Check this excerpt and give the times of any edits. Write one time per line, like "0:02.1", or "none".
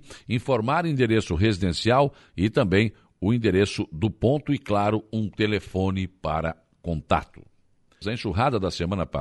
0:08.0